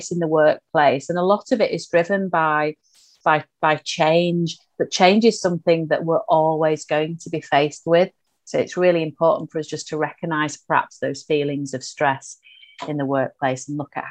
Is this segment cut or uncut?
uncut